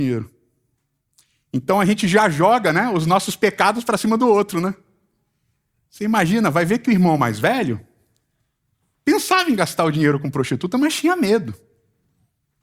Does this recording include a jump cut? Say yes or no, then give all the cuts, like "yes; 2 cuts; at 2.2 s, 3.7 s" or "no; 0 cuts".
no; 0 cuts